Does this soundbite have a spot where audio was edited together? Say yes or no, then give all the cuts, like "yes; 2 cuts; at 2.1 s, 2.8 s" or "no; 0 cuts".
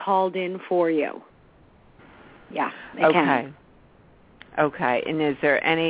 no; 0 cuts